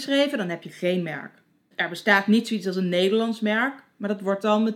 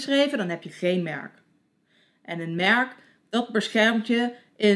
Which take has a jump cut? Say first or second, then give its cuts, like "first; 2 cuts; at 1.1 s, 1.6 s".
first; 1 cut; at 1.7 s